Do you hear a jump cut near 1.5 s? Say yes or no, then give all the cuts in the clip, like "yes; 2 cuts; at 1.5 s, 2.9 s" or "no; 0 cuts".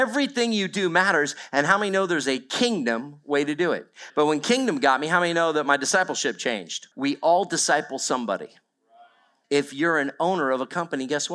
no; 3 cuts; at 4.1 s, 6.9 s, 9.4 s